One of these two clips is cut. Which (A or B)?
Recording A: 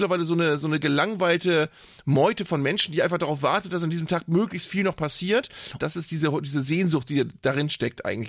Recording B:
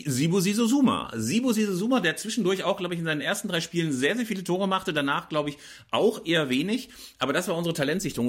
A